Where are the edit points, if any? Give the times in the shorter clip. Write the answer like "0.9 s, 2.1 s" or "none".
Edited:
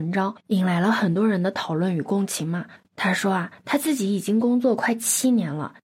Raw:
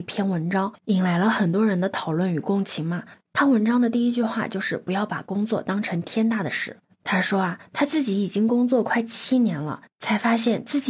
2.8 s